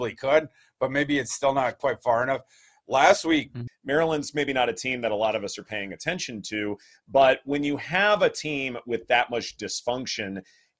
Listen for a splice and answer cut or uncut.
cut